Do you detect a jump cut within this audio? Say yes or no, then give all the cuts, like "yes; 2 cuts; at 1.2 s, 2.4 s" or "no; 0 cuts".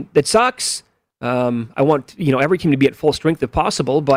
yes; 1 cut; at 1.1 s